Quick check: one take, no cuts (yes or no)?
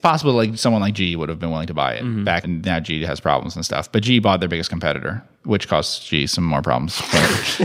no